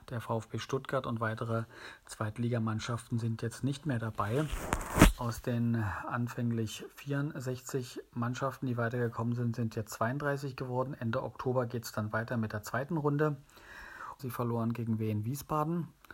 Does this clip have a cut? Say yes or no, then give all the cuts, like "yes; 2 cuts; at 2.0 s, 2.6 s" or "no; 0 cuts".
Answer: yes; 1 cut; at 14.2 s